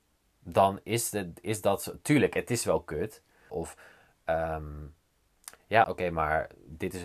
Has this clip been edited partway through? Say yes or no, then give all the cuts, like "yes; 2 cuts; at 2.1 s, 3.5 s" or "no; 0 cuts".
yes; 2 cuts; at 3.5 s, 5.8 s